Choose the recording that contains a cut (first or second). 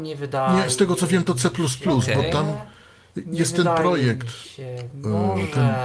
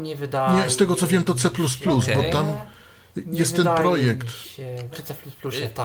second